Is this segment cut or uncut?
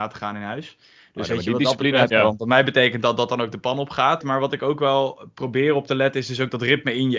cut